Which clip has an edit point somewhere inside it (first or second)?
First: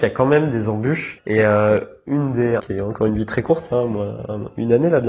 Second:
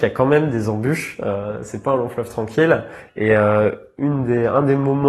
first